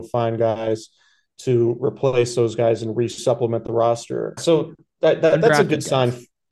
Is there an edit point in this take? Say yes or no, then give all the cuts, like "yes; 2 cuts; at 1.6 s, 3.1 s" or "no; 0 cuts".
yes; 1 cut; at 4.4 s